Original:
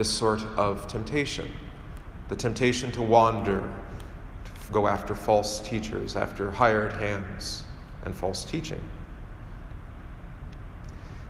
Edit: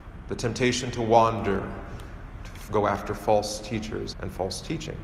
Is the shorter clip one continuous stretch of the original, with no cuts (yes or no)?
no